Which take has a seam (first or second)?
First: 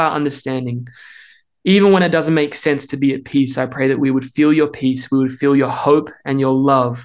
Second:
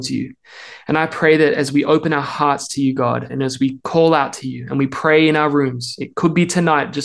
second